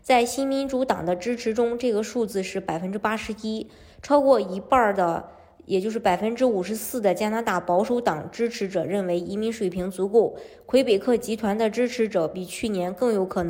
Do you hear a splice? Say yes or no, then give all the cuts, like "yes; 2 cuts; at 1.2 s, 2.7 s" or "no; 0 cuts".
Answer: no; 0 cuts